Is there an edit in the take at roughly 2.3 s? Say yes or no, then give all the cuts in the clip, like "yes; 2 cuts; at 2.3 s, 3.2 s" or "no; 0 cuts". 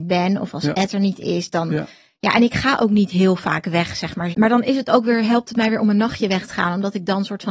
no; 1 cut; at 4.3 s